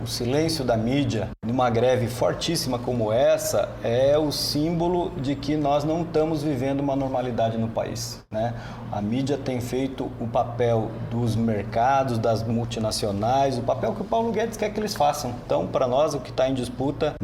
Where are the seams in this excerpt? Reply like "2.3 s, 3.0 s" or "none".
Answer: none